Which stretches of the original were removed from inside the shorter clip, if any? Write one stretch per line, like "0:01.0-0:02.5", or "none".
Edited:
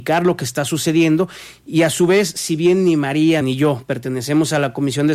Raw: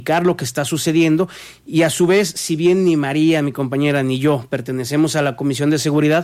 0:03.4-0:04.0